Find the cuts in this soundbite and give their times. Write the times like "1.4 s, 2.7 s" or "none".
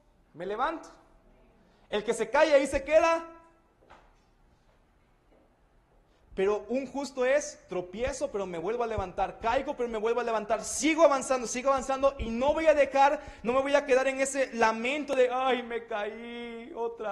none

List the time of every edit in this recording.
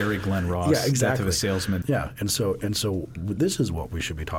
1.8 s

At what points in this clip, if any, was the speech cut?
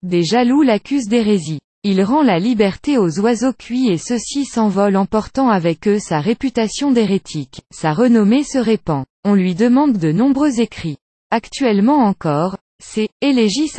1.7 s, 7.7 s

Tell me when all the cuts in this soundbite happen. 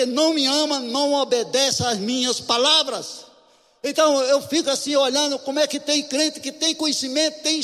none

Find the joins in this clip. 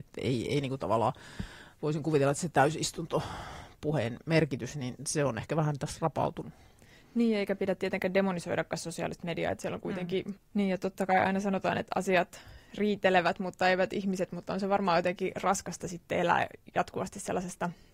10.4 s

